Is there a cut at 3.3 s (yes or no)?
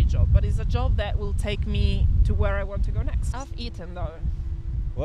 yes